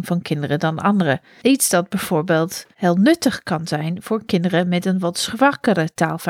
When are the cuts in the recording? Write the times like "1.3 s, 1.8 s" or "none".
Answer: 1.4 s, 2.7 s